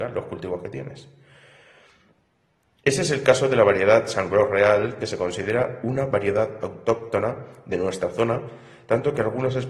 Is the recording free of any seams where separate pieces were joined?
yes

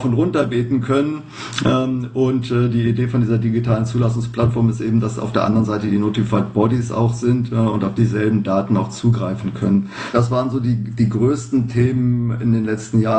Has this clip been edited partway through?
no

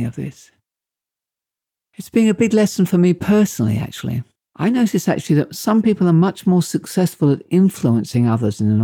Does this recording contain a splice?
yes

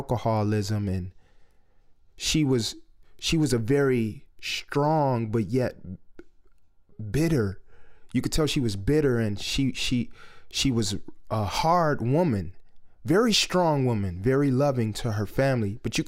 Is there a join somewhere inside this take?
no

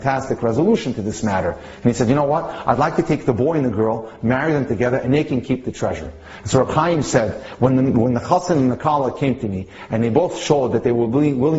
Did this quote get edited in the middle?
no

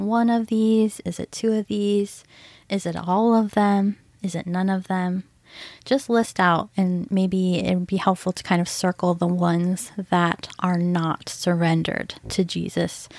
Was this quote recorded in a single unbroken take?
yes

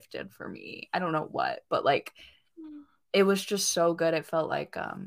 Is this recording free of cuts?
yes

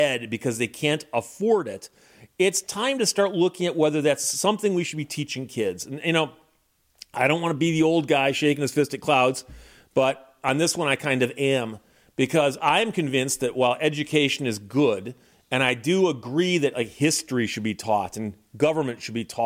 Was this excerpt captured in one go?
yes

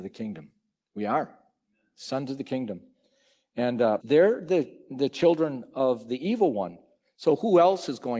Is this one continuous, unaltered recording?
no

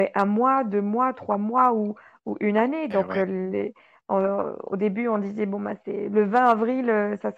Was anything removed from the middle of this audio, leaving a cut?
no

